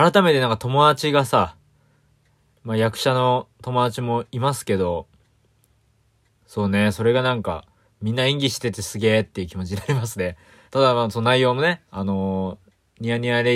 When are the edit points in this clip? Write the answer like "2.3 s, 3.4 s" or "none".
10.7 s, 11.9 s